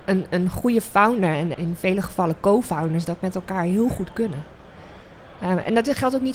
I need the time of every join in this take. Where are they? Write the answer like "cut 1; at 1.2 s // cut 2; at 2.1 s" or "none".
cut 1; at 1.5 s